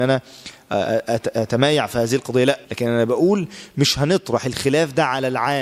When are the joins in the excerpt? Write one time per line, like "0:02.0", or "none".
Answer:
0:02.6